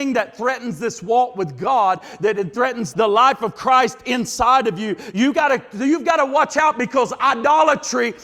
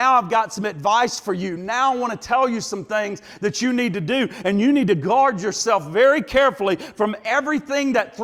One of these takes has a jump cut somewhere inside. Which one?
first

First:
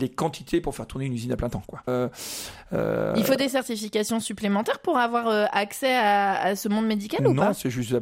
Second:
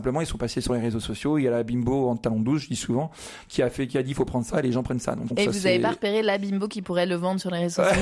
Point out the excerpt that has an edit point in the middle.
first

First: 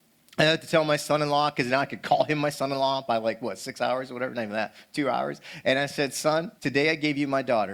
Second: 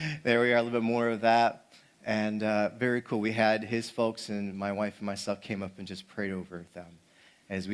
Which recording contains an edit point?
first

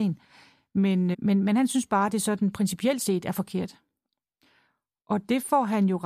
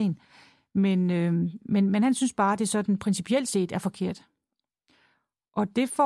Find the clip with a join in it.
first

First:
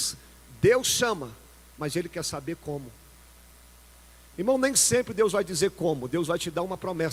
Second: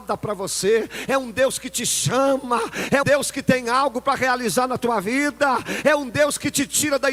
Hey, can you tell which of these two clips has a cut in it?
second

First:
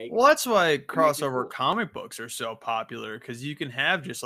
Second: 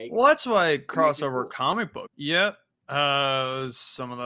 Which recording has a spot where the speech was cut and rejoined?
second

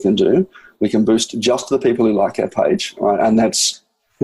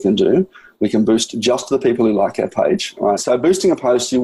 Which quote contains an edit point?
second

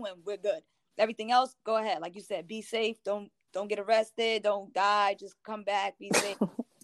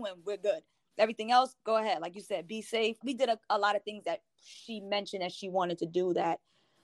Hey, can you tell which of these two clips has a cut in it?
second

